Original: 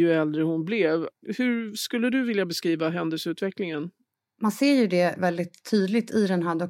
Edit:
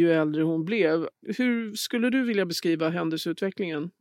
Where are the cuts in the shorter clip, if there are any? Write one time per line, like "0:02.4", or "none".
none